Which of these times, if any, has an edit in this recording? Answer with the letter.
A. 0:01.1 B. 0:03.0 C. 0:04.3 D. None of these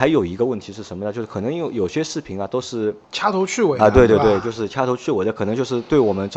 B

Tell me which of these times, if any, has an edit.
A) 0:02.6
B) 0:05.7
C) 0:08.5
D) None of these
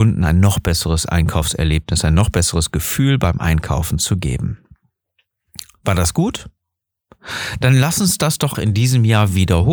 C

